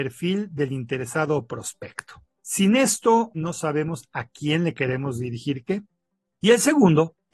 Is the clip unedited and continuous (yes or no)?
no